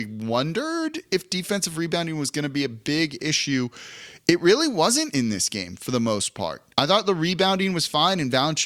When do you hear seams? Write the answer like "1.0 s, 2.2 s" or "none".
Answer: 6.7 s